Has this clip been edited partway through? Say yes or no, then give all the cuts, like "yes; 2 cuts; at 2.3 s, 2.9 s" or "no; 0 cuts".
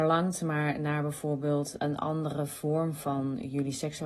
yes; 1 cut; at 1.8 s